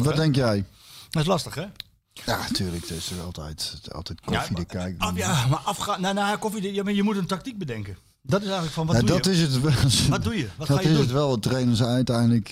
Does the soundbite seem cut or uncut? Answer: uncut